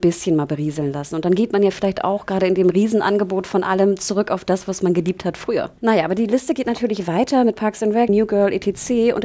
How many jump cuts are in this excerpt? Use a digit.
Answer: 2